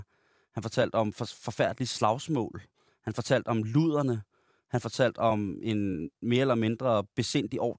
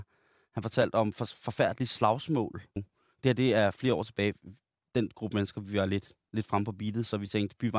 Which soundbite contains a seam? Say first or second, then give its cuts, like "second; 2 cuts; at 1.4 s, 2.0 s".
second; 1 cut; at 2.8 s